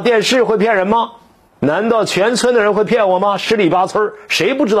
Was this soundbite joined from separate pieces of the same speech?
no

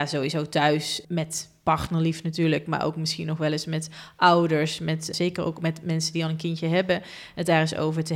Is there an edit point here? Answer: yes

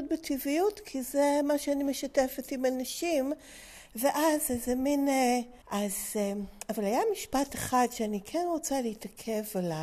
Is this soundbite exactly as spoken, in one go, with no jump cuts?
no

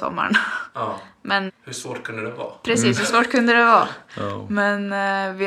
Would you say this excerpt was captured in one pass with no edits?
no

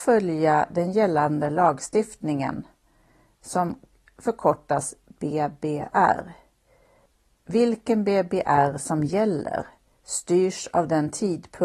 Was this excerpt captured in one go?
yes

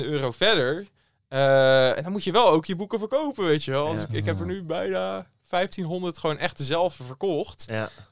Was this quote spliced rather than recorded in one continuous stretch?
no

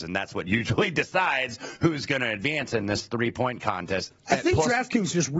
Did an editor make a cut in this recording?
yes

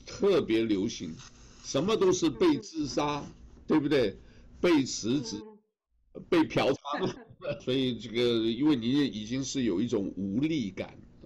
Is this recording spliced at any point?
yes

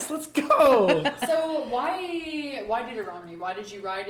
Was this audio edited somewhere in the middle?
no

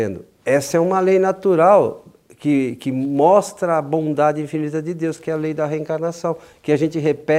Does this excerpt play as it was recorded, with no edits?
yes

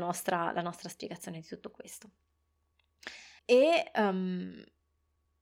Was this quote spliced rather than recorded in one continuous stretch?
yes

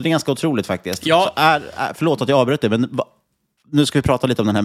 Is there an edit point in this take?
no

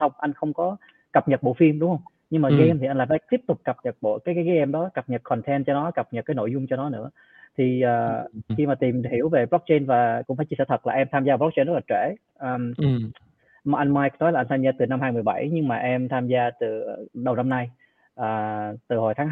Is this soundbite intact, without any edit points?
no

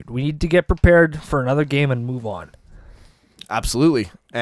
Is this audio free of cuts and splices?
yes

